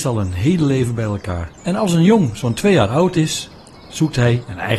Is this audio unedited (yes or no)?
no